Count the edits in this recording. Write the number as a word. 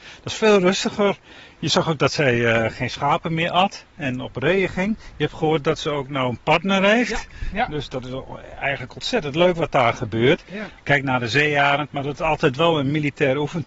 two